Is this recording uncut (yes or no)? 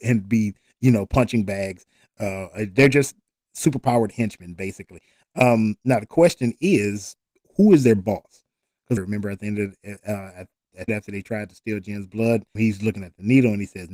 no